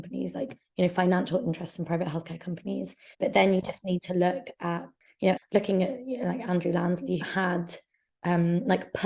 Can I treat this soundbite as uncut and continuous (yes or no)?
no